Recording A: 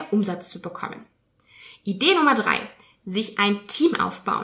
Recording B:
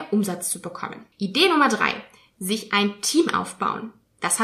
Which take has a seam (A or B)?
B